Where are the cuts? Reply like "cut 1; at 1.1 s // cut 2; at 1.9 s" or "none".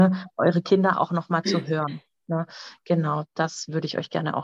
cut 1; at 0.9 s